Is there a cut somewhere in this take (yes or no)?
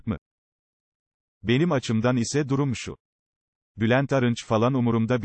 yes